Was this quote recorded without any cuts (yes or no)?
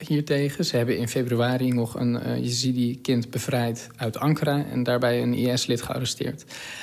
yes